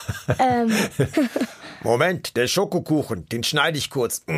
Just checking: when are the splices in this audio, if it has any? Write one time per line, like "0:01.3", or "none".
0:01.1

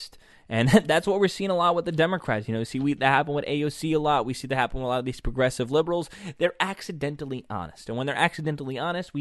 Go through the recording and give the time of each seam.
none

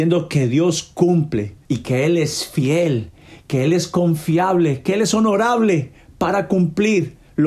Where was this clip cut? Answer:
0:01.6

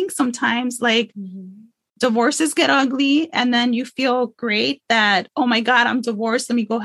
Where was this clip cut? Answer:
none

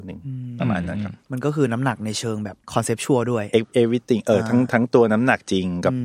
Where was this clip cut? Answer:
0:01.2
0:02.6

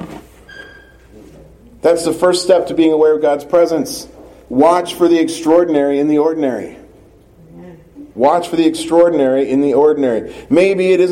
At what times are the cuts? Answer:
0:08.1

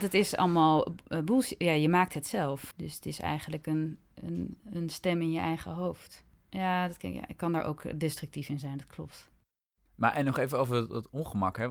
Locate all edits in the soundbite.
0:04.6

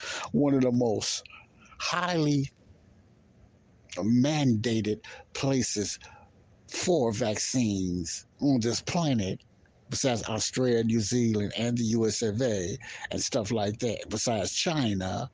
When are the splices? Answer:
0:08.3

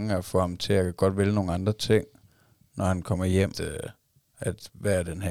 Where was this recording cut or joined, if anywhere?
0:03.5

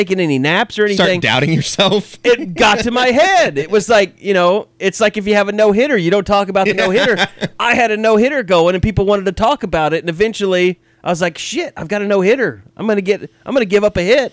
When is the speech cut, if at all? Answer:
none

